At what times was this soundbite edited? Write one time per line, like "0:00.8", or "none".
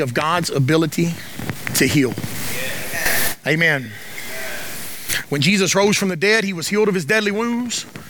none